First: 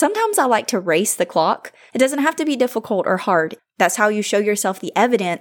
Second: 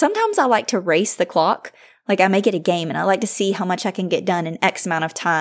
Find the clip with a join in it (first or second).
first